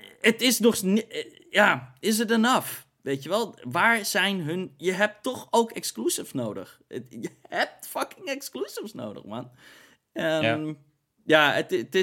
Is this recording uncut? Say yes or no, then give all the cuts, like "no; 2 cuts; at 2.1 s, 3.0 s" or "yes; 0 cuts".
yes; 0 cuts